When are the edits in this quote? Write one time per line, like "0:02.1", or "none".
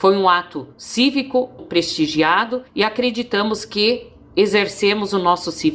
0:01.6
0:02.7